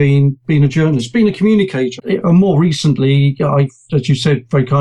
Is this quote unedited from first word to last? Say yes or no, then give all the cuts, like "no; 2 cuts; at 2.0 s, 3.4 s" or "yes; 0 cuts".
no; 1 cut; at 2.0 s